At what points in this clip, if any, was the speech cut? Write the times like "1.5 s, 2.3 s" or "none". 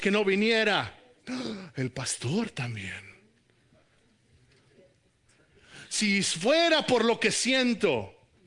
none